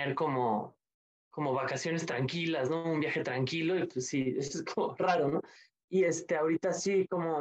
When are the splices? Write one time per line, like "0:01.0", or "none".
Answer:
none

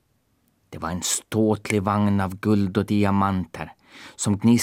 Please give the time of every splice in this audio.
none

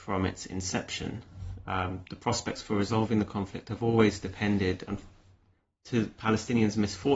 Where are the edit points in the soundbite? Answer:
none

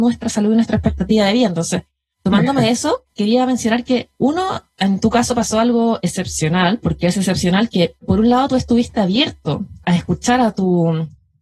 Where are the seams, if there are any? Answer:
0:09.8

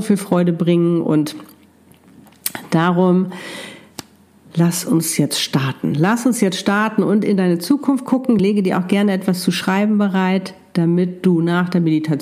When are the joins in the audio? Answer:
none

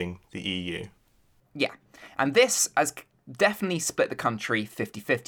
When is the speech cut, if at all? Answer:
none

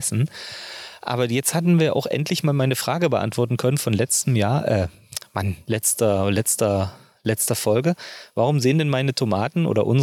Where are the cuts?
none

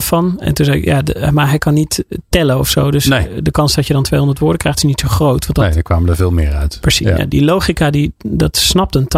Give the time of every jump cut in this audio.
none

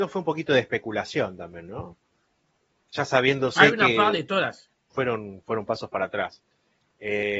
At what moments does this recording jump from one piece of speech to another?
0:04.9

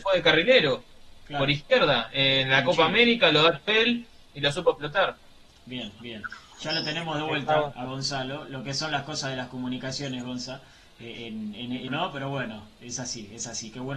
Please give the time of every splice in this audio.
0:11.9

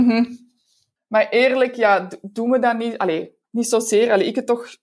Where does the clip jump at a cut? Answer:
0:01.0

